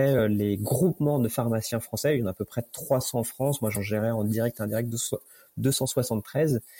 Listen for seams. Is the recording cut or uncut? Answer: uncut